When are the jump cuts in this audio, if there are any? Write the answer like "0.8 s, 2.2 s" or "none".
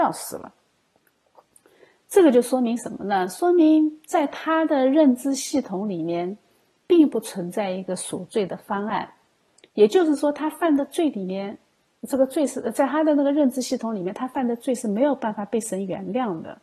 none